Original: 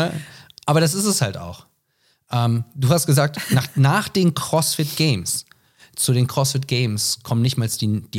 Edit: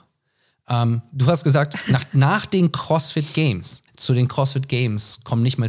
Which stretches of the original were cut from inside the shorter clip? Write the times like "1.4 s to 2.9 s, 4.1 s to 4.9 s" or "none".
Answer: 5.5 s to 5.9 s